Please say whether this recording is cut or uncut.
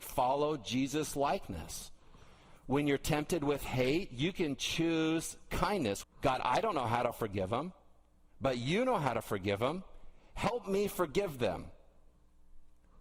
cut